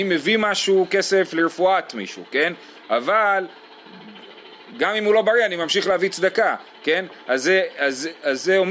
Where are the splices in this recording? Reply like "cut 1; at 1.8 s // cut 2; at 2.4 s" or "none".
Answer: none